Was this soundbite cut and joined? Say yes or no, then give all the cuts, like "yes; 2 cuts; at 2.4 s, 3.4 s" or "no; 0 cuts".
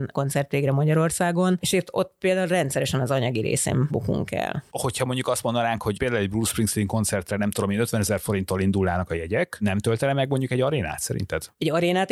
no; 0 cuts